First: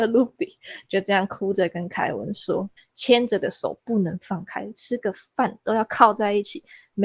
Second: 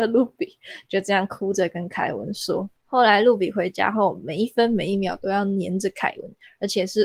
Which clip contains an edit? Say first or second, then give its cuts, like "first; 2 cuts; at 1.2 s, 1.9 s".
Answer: first; 1 cut; at 2.8 s